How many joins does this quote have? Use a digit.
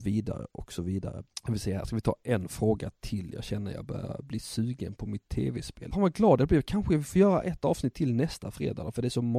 1